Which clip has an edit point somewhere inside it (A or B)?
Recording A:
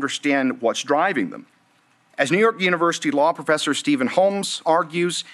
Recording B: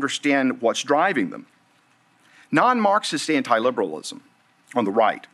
A